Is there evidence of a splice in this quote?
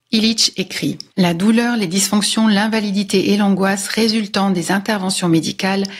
yes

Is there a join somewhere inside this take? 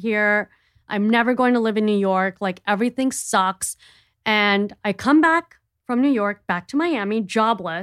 no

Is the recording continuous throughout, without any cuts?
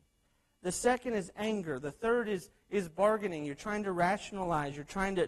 yes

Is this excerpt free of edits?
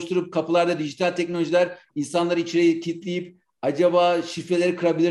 yes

